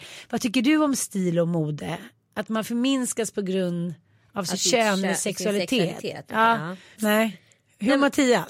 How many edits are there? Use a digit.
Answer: 1